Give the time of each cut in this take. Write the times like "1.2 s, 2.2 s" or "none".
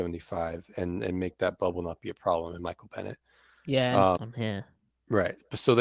4.2 s